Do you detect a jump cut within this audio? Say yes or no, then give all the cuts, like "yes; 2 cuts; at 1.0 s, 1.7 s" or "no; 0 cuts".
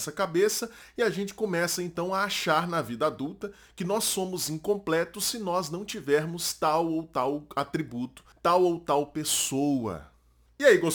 yes; 1 cut; at 8.3 s